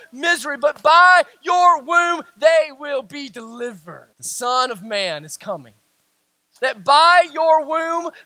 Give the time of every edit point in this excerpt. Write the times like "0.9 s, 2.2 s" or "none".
4.1 s, 6.6 s